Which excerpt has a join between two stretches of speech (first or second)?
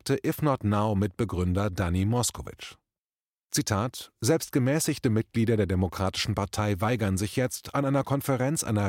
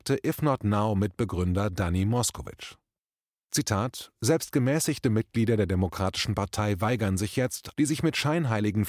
second